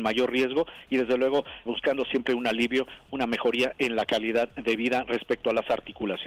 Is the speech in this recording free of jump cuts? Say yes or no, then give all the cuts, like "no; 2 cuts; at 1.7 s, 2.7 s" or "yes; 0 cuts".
no; 1 cut; at 1.7 s